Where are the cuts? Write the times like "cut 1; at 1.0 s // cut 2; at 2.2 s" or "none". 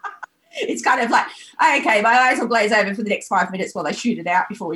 none

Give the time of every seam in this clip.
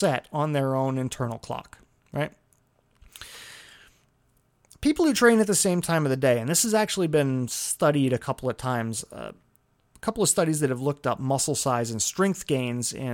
none

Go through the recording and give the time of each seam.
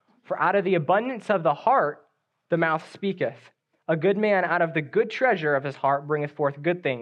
none

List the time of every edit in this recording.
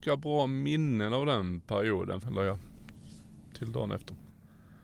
cut 1; at 2.2 s

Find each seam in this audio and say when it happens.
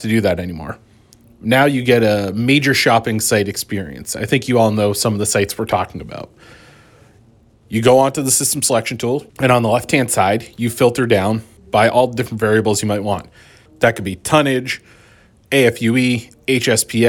cut 1; at 9.3 s

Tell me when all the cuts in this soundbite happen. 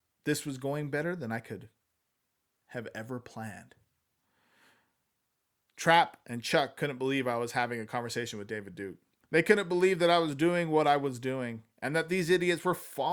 cut 1; at 9.2 s

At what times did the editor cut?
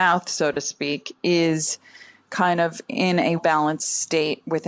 cut 1; at 3.4 s

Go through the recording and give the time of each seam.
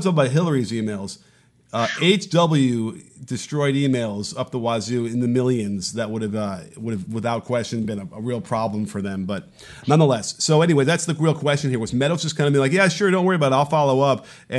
none

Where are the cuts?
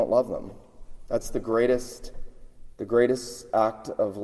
none

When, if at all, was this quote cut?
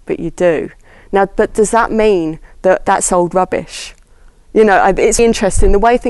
cut 1; at 5.2 s

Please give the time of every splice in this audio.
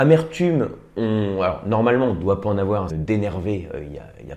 cut 1; at 2.9 s

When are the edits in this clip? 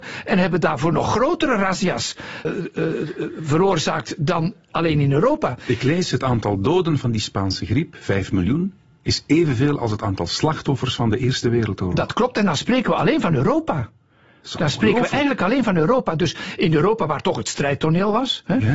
cut 1; at 2.4 s

